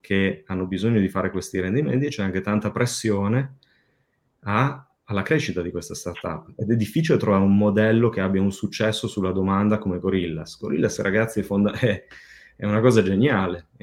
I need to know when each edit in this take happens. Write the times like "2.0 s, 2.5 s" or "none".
none